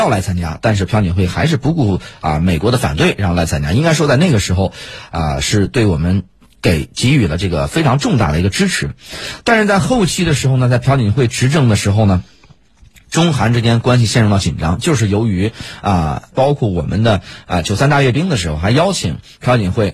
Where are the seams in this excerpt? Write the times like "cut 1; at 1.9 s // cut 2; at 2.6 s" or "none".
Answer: cut 1; at 16.3 s